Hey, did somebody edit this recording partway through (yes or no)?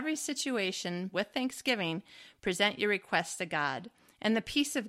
yes